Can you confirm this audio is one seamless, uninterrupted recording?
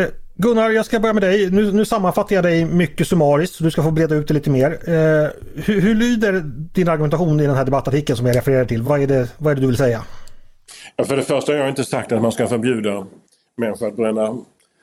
yes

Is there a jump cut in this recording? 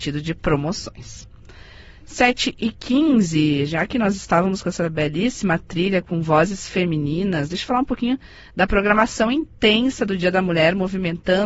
no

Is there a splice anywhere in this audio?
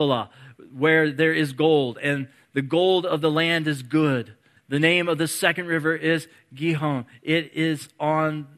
yes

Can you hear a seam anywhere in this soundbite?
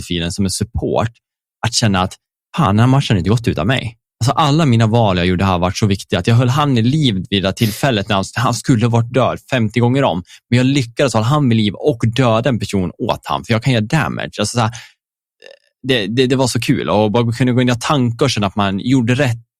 no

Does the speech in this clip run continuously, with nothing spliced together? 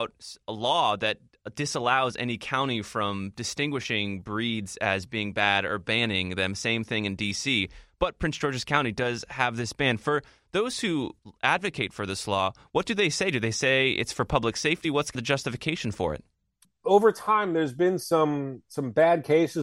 yes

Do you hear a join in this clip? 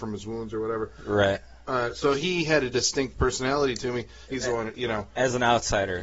yes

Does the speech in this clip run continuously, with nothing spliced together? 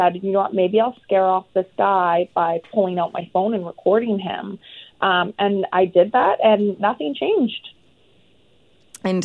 yes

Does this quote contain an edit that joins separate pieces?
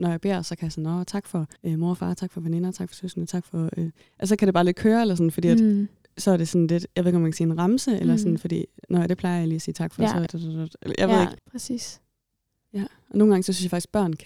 yes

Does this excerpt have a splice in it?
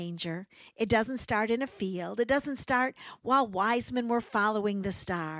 no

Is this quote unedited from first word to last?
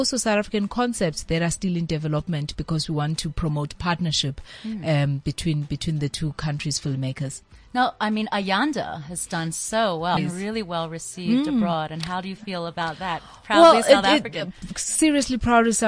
no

